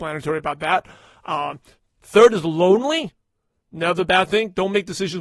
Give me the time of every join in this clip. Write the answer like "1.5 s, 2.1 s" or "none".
3.6 s